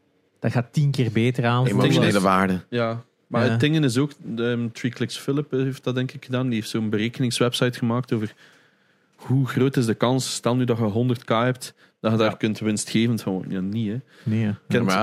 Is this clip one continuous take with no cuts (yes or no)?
yes